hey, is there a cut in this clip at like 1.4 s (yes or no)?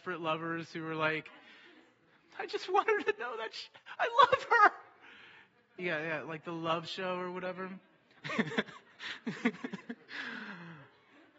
no